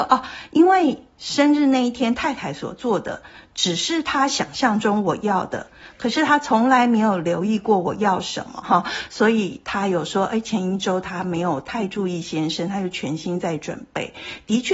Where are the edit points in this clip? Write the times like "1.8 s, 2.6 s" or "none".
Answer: 8.6 s